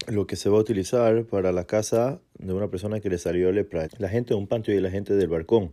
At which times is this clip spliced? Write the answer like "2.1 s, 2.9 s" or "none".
3.8 s